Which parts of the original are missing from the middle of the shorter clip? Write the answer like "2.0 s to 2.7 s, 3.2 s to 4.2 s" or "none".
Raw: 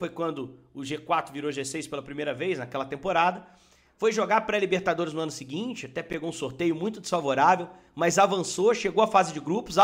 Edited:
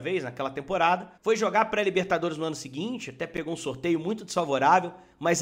3.5 s to 3.9 s